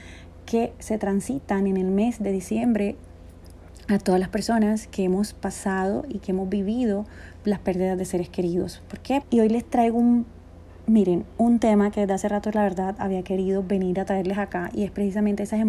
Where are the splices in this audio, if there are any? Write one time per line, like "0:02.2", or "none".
0:09.2